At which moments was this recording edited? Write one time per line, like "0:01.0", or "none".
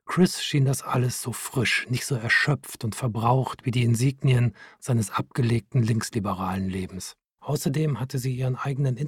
0:07.4